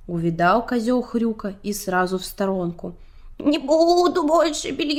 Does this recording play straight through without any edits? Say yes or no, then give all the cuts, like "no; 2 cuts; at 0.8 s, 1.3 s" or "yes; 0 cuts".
no; 1 cut; at 3.3 s